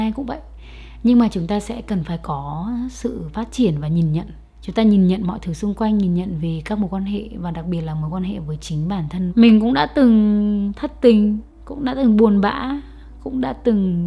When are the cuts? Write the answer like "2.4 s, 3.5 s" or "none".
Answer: 9.3 s